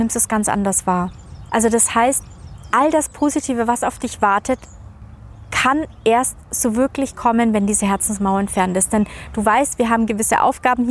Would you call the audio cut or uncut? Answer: cut